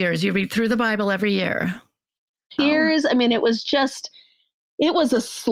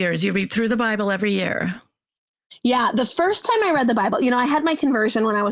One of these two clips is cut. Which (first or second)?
first